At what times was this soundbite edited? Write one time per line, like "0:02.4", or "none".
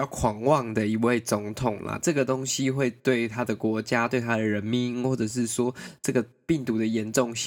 0:02.0